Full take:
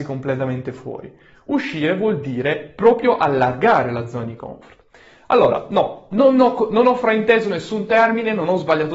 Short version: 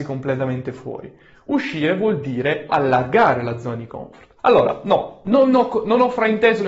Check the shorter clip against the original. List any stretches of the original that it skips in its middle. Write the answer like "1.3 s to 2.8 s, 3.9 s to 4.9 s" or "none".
2.7 s to 3.2 s, 4.9 s to 5.2 s